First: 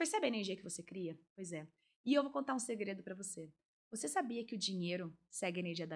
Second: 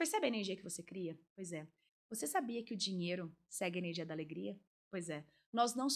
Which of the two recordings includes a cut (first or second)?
second